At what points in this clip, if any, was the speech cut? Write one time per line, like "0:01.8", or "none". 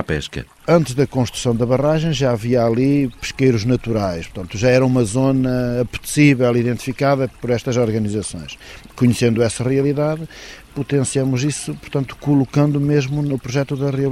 none